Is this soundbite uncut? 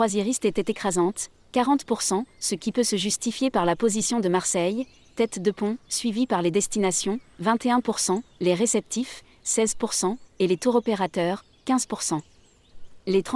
yes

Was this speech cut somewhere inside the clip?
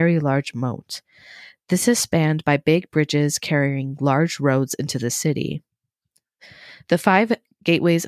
no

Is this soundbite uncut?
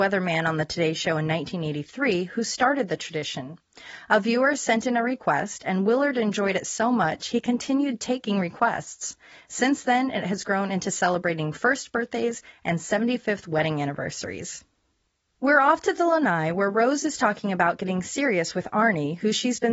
yes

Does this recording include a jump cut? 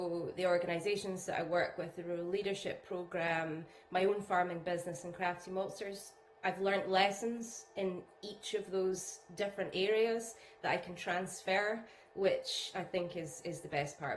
no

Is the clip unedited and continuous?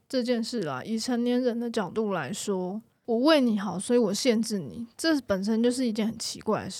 yes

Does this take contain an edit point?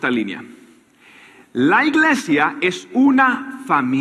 no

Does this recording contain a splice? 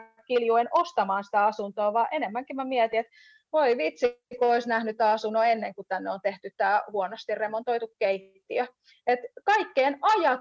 no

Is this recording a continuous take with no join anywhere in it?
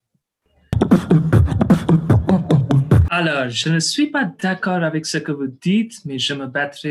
yes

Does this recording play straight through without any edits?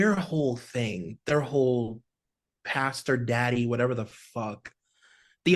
yes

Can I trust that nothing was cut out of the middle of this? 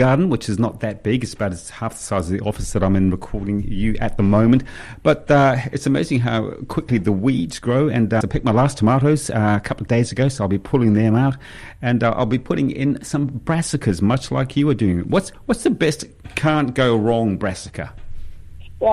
no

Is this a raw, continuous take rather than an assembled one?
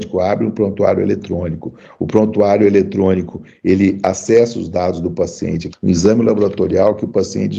no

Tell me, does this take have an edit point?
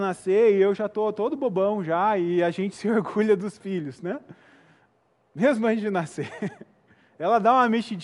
no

